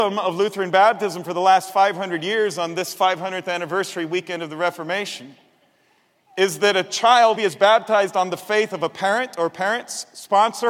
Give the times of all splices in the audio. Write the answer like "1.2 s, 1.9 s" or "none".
7.4 s